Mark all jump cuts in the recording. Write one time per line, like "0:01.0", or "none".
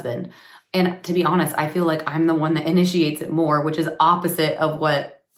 none